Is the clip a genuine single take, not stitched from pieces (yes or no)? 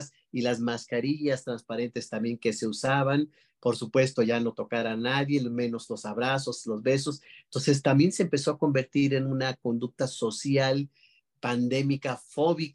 yes